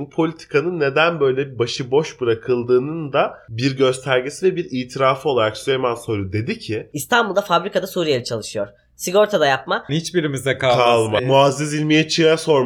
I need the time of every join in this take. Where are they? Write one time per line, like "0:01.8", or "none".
0:09.9
0:11.2